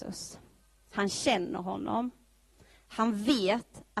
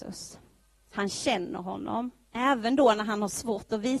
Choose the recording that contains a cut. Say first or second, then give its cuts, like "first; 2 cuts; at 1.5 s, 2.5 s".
second; 1 cut; at 2.3 s